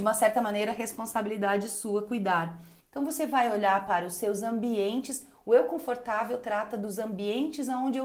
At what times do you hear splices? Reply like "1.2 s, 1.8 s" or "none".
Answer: 2.8 s

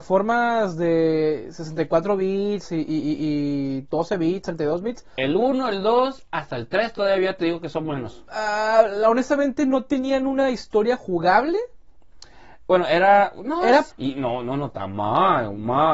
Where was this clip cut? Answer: 13.9 s

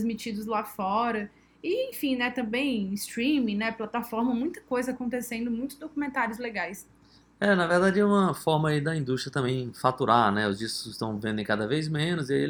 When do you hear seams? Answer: none

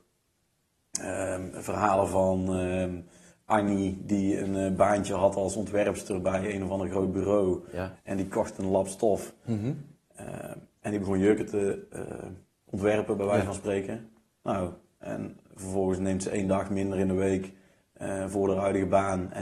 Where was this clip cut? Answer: 8.0 s

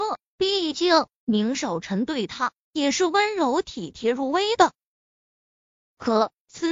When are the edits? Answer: none

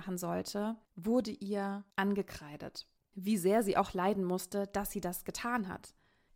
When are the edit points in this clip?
3.0 s

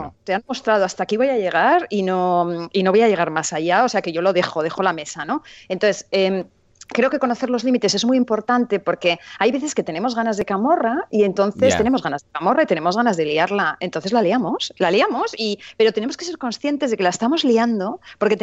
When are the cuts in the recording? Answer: none

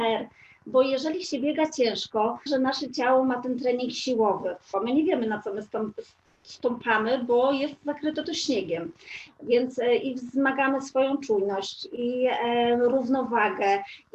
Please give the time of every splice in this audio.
2.5 s, 4.7 s

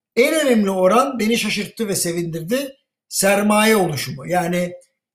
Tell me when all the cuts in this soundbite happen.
none

